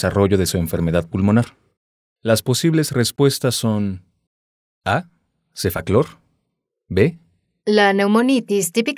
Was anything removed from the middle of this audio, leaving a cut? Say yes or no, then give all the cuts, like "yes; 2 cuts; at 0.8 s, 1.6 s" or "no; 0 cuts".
yes; 1 cut; at 7.6 s